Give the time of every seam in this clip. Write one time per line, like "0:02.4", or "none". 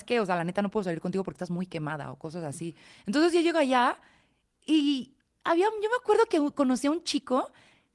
none